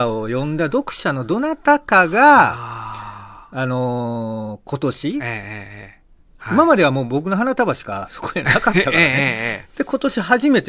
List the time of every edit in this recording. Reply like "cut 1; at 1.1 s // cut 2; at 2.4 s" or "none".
cut 1; at 6.4 s